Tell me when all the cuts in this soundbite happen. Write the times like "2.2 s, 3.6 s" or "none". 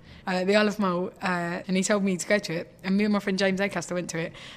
1.6 s